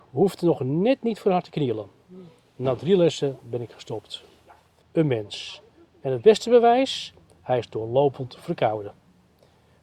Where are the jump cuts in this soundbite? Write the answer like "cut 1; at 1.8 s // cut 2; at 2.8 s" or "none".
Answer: cut 1; at 4.8 s